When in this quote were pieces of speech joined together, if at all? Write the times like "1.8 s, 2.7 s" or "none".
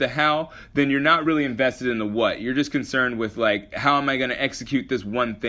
none